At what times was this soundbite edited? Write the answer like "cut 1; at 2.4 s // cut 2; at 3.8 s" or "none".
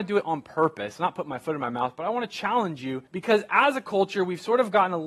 cut 1; at 3.1 s